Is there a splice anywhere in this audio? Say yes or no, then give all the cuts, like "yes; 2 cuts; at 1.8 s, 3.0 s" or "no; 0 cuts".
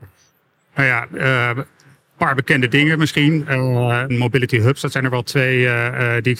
yes; 1 cut; at 4.1 s